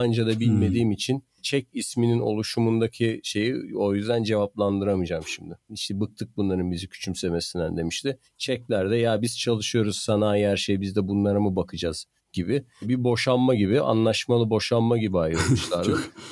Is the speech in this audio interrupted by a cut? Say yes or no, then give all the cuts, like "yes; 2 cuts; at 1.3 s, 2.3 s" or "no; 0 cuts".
yes; 1 cut; at 5.7 s